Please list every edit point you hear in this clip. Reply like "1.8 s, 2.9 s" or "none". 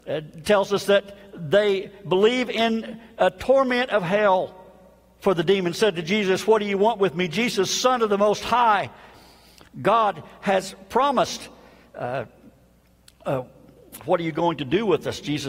none